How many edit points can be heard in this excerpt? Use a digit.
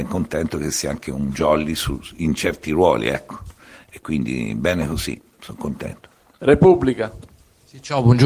0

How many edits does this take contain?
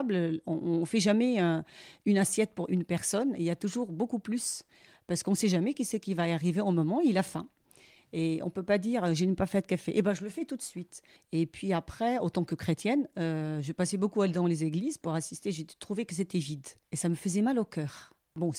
1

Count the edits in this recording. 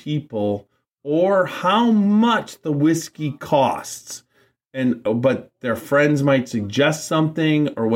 1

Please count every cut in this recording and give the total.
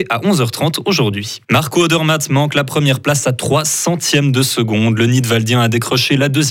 1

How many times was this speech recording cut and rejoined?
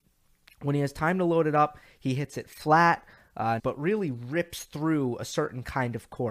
1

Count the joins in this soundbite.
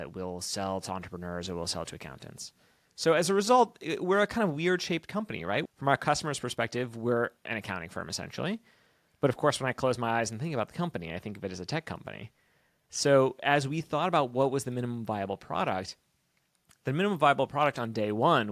2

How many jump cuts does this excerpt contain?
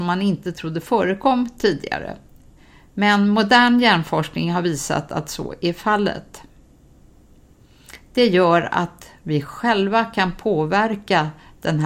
0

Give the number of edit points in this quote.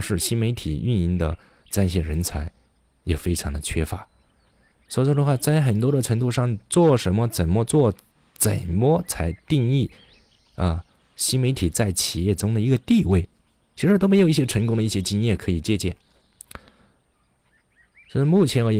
0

